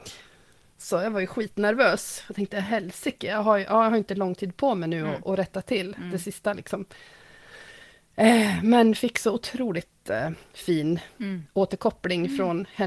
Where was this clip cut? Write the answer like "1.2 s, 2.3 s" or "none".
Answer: none